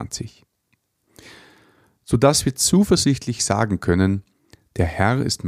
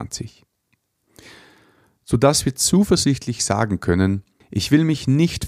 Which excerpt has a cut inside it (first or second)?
second